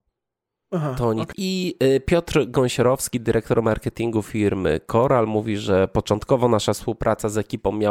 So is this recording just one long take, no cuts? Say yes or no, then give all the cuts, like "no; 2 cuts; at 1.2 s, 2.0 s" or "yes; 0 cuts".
no; 1 cut; at 1.3 s